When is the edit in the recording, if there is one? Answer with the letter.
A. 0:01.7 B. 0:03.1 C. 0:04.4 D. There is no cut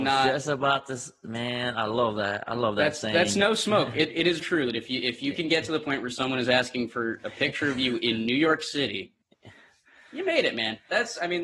C